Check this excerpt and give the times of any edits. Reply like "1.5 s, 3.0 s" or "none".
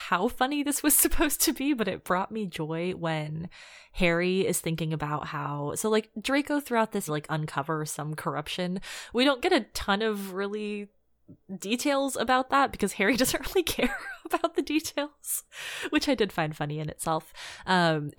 7.1 s